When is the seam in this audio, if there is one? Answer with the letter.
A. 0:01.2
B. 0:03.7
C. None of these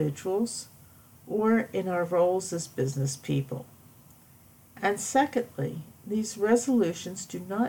C